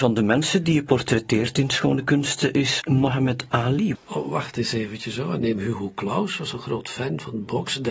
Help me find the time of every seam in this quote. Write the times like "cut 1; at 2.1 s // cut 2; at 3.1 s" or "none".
cut 1; at 2.8 s // cut 2; at 3.9 s // cut 3; at 5.4 s